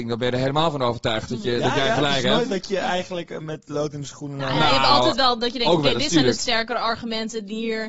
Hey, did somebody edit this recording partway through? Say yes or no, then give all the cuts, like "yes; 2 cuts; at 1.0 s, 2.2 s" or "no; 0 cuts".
no; 0 cuts